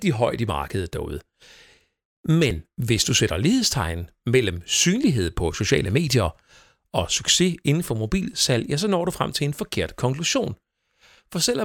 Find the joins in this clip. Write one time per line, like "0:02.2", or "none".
none